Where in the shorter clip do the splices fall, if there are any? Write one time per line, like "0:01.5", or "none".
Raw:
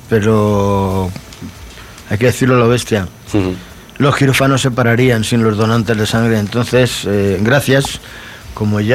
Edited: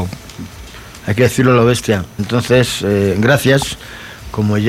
0:02.2